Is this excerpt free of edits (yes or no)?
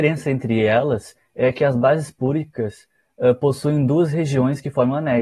yes